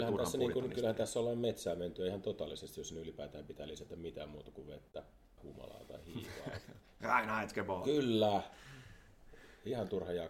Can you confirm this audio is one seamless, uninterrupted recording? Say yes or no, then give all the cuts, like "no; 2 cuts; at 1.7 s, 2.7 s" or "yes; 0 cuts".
no; 1 cut; at 5.4 s